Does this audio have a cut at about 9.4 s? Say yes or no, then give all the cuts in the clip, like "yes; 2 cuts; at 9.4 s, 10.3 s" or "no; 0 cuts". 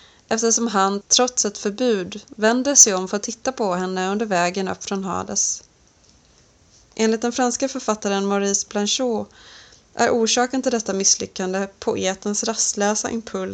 no; 0 cuts